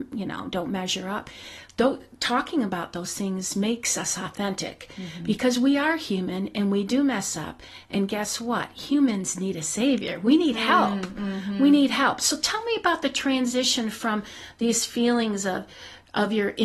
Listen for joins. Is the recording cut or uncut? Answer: uncut